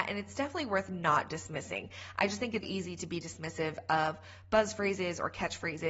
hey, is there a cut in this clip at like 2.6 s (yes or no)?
yes